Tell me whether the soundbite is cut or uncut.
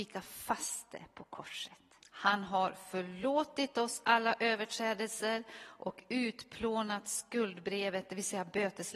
cut